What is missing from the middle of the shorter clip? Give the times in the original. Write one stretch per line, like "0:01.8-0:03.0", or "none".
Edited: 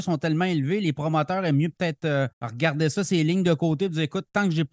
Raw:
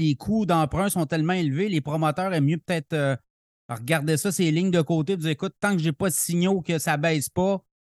0:03.2-0:03.6